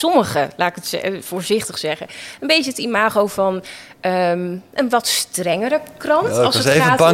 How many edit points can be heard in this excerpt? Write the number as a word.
zero